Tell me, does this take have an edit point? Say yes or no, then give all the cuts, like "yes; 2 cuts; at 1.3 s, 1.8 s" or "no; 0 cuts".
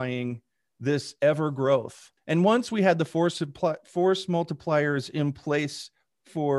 yes; 1 cut; at 2.2 s